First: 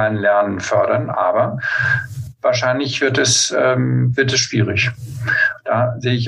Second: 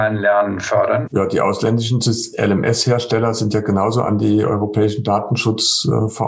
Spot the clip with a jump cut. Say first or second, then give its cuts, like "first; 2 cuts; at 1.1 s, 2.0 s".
second; 1 cut; at 1.1 s